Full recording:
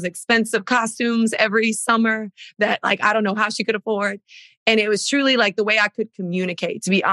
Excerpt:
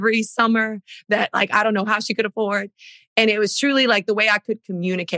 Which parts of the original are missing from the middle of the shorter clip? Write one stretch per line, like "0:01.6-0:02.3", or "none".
none